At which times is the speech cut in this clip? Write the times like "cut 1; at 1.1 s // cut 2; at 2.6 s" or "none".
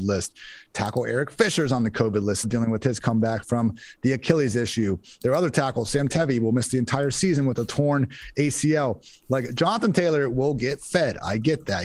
cut 1; at 2.4 s